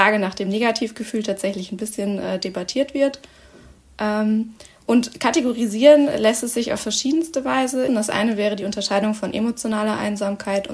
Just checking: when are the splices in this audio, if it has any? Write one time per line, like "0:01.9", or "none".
0:07.9